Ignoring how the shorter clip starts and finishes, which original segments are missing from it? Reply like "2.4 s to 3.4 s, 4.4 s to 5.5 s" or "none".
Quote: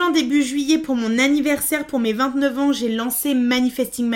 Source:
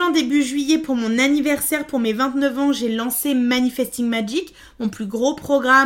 none